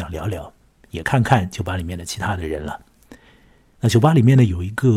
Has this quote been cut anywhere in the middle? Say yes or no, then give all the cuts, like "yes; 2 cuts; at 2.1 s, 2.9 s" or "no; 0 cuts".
no; 0 cuts